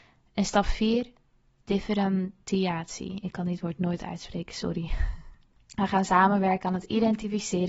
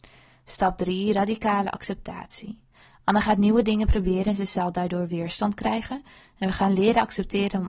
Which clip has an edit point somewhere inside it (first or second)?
first